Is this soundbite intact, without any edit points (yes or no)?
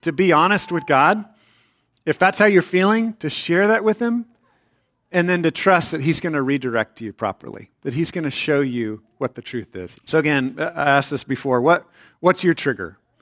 no